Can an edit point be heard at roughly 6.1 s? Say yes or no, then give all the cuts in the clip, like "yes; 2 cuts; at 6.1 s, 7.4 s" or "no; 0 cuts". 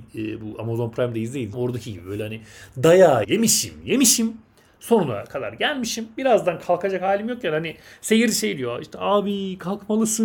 no; 2 cuts; at 1.5 s, 3.2 s